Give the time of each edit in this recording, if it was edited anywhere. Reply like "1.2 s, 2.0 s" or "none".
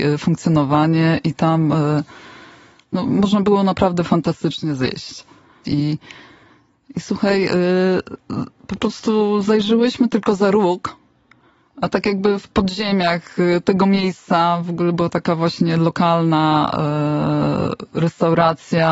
5.6 s